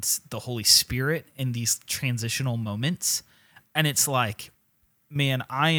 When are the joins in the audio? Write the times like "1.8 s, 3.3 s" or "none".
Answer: none